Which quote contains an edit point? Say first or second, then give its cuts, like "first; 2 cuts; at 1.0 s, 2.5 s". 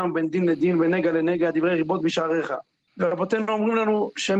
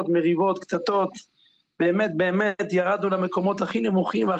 first; 1 cut; at 2.9 s